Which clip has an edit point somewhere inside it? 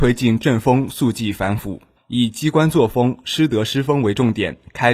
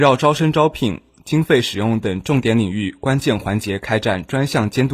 first; 1 cut; at 2.0 s

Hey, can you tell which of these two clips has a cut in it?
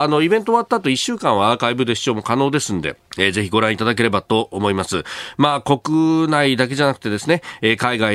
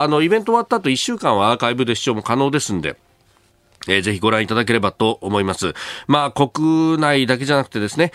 first; 1 cut; at 3.1 s

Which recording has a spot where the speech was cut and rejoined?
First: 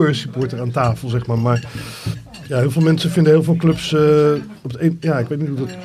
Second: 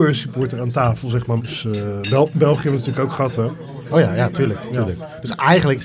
second; 1 cut; at 1.4 s

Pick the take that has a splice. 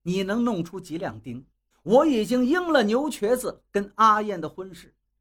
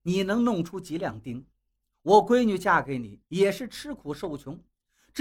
first; 1 cut; at 1.7 s

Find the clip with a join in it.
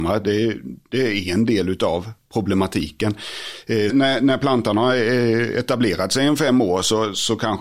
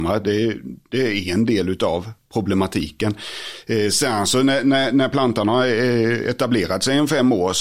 first; 1 cut; at 3.9 s

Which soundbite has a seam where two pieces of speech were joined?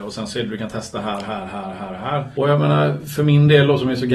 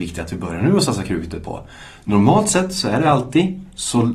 first; 1 cut; at 2.3 s

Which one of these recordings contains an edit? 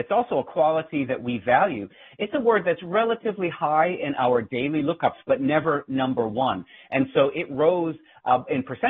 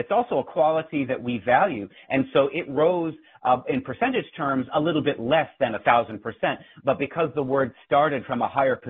second; 1 cut; at 2.0 s

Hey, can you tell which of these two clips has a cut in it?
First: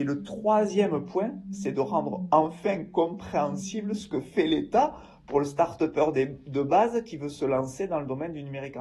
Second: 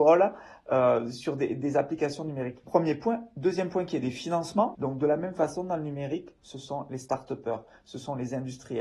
second; 3 cuts; at 2.6 s, 4.7 s, 6.4 s

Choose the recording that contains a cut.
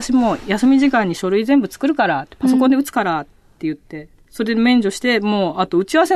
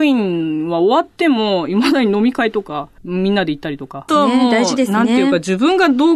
second; 2 cuts; at 3.0 s, 4.1 s

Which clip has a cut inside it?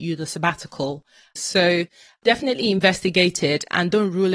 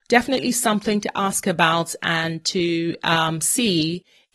first; 1 cut; at 1.4 s

